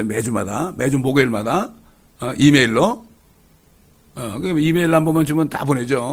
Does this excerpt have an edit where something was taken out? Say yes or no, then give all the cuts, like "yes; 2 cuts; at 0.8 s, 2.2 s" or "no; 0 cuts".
no; 0 cuts